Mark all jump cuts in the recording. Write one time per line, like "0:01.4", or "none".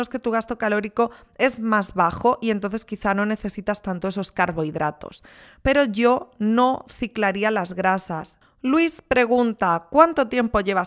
0:08.4